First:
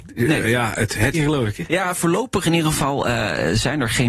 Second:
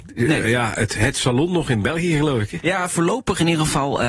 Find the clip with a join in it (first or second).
first